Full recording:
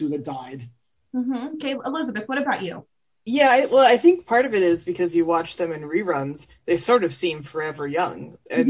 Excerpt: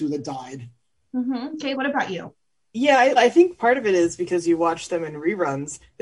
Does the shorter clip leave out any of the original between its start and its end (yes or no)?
yes